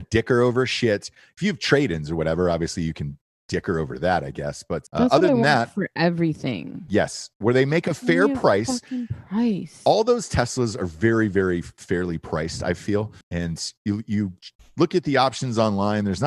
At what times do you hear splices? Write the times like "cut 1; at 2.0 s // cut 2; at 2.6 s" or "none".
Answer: cut 1; at 4.9 s // cut 2; at 13.2 s